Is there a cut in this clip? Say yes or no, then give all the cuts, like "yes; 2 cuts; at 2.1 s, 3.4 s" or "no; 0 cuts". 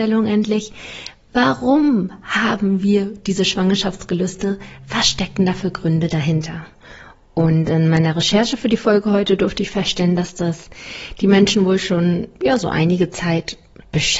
no; 0 cuts